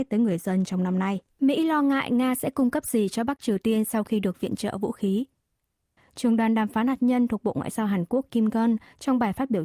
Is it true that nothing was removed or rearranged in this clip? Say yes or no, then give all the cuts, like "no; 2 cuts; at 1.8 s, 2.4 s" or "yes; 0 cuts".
no; 2 cuts; at 1.3 s, 6.0 s